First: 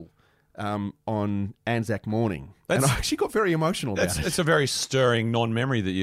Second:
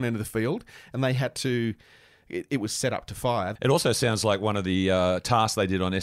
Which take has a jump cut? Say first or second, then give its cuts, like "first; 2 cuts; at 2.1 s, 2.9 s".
second; 1 cut; at 3.6 s